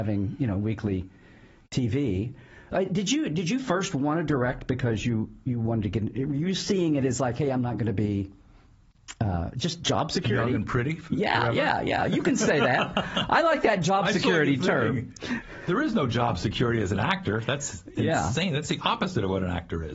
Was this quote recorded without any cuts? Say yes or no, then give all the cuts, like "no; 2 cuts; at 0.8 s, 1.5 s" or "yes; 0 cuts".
yes; 0 cuts